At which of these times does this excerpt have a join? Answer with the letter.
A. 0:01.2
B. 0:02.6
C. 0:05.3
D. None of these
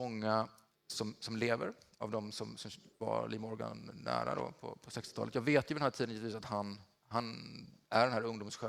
D